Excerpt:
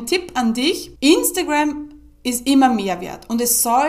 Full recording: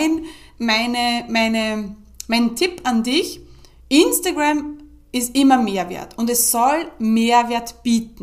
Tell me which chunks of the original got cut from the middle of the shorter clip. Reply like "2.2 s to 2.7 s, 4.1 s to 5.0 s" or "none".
3.4 s to 3.8 s